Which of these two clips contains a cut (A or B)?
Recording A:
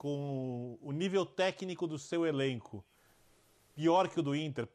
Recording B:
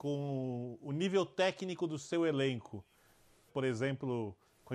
B